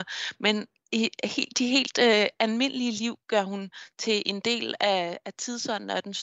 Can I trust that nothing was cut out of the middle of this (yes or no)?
yes